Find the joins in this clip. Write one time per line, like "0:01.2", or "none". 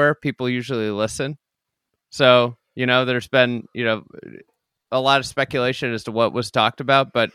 none